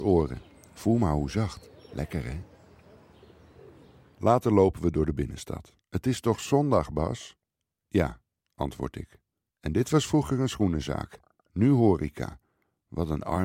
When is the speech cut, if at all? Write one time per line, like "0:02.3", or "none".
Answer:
0:05.8
0:09.5